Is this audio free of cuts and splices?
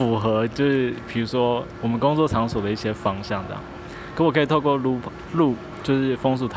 yes; 0 cuts

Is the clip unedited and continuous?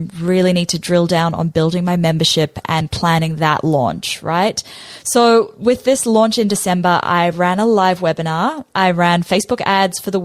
yes; 0 cuts

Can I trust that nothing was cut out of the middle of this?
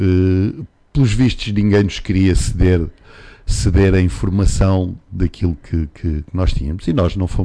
yes; 0 cuts

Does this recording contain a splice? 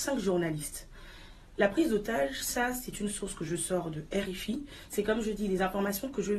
no; 0 cuts

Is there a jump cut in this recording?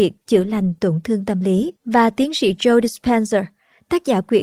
yes; 1 cut; at 1.8 s

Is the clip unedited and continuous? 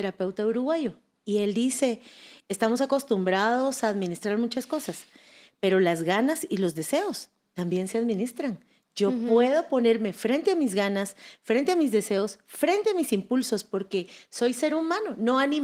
yes; 0 cuts

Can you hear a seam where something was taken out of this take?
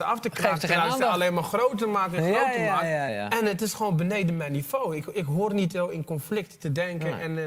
yes; 1 cut; at 3.1 s

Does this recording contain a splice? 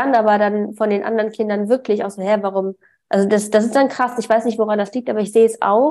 no; 0 cuts

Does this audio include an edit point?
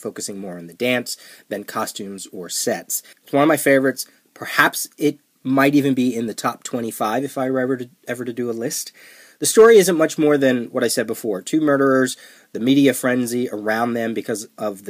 yes; 1 cut; at 3.1 s

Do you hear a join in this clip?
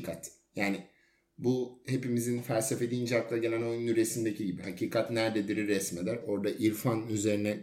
yes; 2 cuts; at 4.6 s, 6.2 s

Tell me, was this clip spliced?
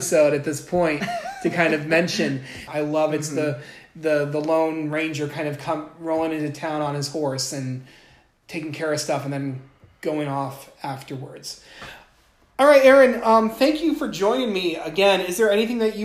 yes; 1 cut; at 2.7 s

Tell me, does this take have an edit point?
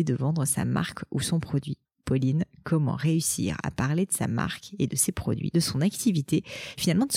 yes; 1 cut; at 1.9 s

